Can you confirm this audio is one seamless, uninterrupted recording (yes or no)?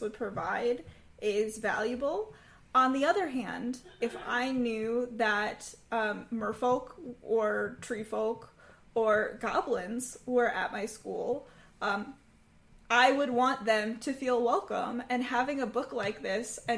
yes